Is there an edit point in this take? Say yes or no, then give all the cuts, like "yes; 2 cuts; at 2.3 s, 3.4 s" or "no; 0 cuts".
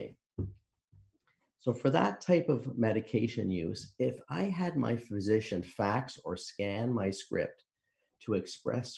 no; 0 cuts